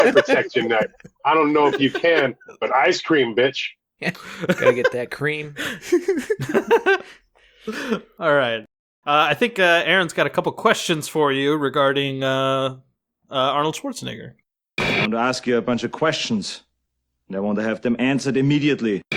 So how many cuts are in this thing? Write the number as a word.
zero